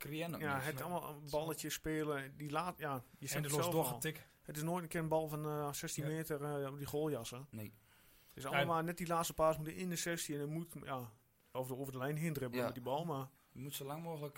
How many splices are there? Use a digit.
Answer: 1